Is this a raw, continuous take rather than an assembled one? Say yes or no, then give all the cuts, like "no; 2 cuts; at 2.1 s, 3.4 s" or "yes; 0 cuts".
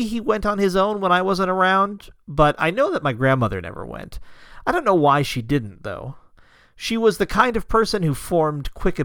yes; 0 cuts